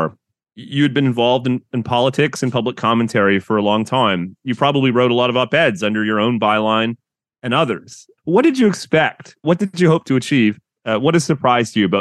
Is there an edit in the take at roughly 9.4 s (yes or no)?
no